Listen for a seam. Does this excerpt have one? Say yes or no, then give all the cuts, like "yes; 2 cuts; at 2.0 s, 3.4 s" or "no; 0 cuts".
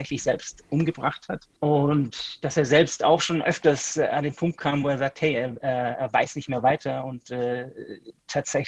yes; 1 cut; at 1.6 s